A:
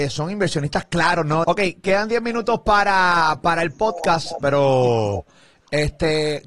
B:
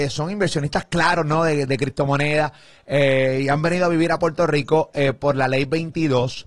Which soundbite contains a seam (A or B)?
A